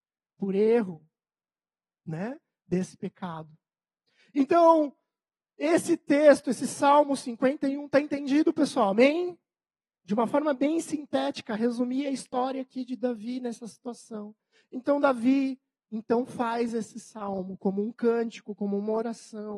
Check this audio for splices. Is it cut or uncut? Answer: uncut